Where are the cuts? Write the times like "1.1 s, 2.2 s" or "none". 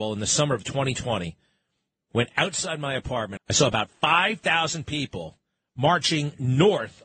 3.4 s